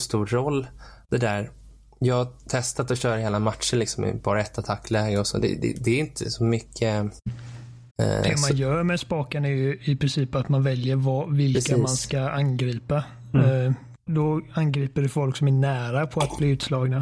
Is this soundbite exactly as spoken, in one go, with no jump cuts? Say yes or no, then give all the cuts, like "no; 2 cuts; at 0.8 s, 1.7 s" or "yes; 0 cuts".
no; 2 cuts; at 7.9 s, 14.1 s